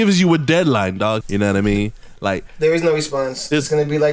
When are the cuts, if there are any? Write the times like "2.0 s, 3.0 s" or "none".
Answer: 1.2 s